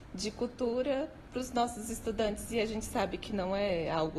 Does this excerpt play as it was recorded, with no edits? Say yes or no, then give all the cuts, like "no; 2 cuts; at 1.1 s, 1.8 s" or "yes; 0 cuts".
yes; 0 cuts